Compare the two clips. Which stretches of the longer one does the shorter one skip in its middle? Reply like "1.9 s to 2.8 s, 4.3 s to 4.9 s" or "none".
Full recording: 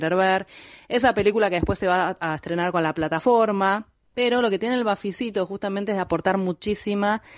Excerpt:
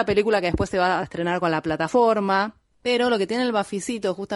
2.1 s to 2.3 s

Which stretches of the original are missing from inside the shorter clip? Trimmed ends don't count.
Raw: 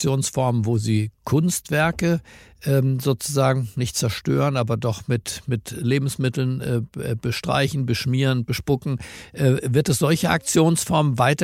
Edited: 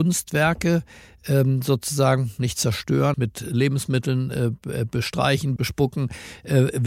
4.5 s to 5.4 s, 7.9 s to 8.5 s

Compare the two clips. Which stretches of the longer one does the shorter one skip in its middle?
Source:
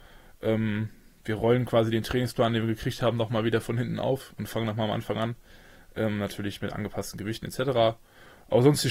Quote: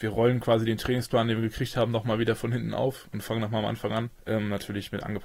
5.4 s to 5.9 s

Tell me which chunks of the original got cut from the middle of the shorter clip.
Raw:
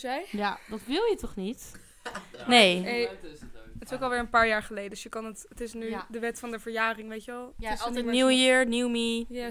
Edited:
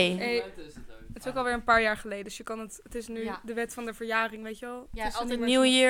none

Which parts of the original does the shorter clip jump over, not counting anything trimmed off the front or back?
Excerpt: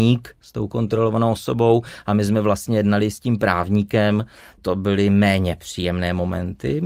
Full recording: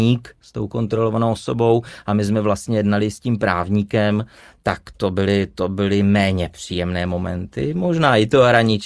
4.6 s to 5.5 s

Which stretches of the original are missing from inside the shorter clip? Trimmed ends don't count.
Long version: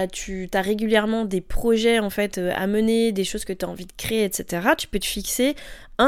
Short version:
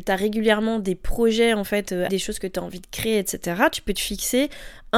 2.5 s to 3.1 s

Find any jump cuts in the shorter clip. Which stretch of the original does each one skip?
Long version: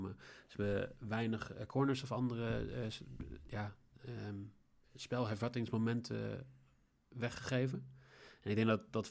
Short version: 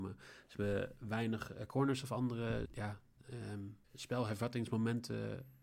2.7 s to 3.4 s, 4.6 s to 4.9 s

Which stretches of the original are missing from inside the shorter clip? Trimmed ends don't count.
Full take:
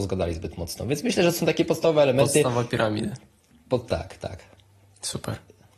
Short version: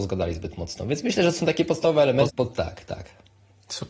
2.3 s to 3.6 s

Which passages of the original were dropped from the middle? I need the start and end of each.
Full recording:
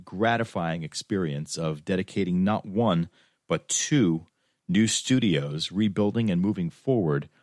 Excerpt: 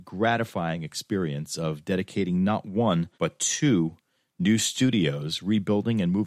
3.1 s to 3.4 s

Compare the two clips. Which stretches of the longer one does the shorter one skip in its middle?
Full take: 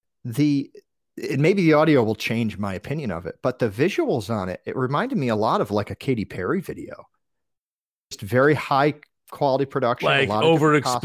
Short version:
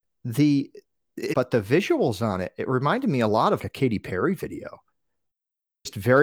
1.3 s to 3.4 s, 5.7 s to 5.9 s

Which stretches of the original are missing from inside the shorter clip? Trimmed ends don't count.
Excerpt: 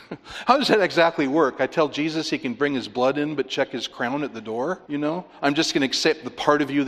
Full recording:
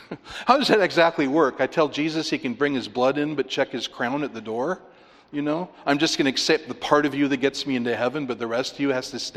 4.8 s to 5.3 s

